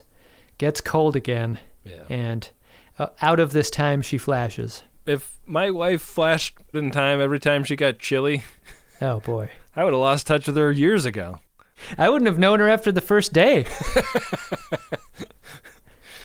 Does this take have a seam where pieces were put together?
no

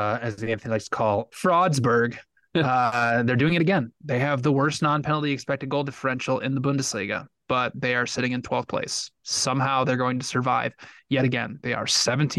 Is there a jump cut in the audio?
no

